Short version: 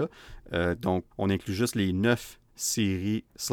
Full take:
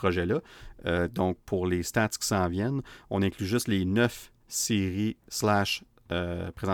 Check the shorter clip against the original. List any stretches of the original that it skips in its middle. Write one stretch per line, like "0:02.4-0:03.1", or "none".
0:01.4-0:03.0

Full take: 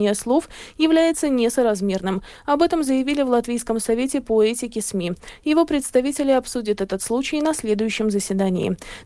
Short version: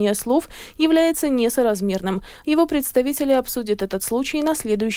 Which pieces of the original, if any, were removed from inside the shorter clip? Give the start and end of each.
0:02.4-0:05.4

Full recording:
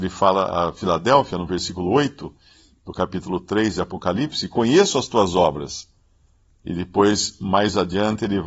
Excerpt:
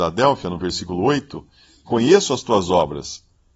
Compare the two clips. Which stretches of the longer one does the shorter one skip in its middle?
0:02.7-0:04.5

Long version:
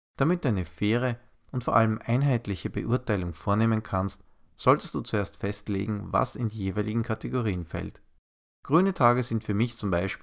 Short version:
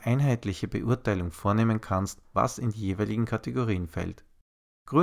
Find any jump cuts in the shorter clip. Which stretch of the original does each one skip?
0:04.4-0:06.1

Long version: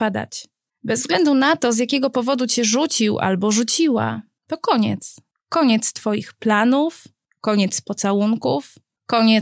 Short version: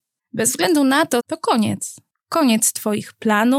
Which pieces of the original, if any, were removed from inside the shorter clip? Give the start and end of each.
0:01.7-0:04.4

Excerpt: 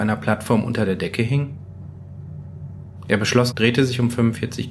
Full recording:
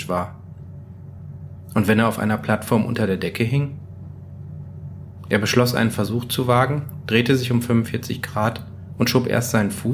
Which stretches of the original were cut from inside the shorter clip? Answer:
0:05.7-0:07.0

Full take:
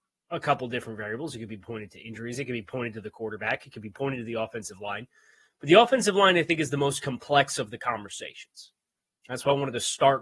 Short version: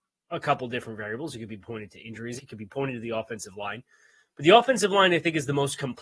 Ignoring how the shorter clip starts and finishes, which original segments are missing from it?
0:02.4-0:03.6

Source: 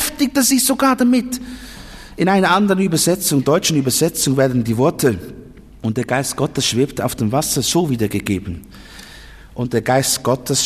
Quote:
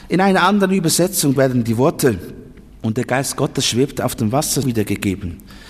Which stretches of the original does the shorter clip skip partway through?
0:03.4-0:04.4
0:07.6-0:07.9

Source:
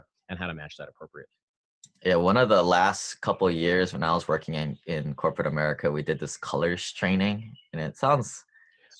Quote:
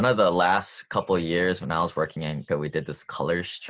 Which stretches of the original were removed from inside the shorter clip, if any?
0:04.8-0:05.8

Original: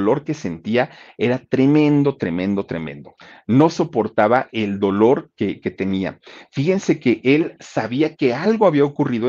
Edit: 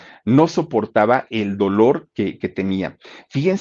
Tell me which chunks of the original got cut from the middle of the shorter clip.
none

